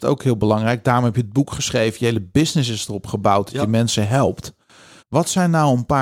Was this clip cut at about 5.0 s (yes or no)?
yes